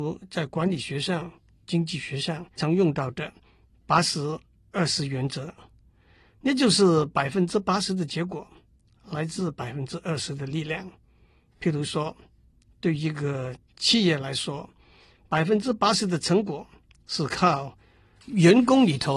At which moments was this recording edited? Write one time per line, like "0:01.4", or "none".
0:02.6